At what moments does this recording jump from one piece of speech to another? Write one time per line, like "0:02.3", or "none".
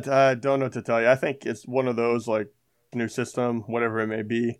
0:02.9